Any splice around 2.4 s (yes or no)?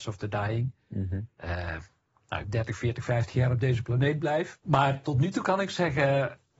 yes